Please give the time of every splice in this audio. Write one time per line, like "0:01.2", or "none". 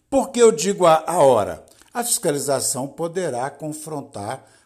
0:01.8